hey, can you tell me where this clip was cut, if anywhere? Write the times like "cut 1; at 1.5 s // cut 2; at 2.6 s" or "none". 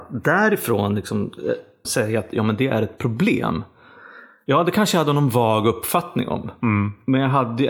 cut 1; at 1.8 s